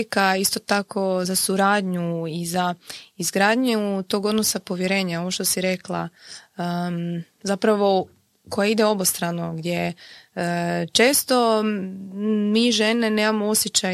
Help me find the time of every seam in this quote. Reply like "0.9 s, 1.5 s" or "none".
1.2 s